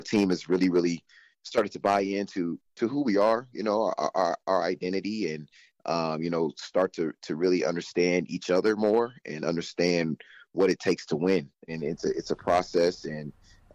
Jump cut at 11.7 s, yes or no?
yes